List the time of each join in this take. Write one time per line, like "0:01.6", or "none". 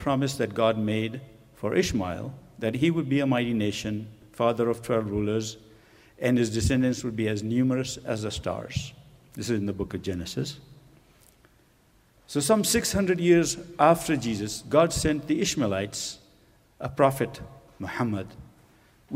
none